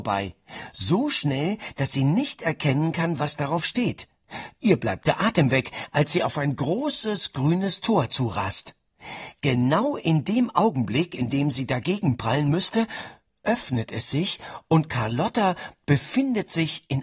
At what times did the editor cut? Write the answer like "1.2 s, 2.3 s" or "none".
none